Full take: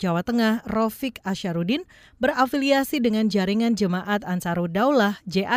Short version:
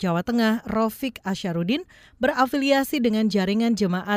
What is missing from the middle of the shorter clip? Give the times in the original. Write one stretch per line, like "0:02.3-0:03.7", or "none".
none